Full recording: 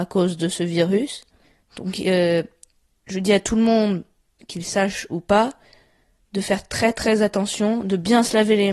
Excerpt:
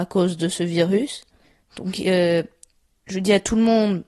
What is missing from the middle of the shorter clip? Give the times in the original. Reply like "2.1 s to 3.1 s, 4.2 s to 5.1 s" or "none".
none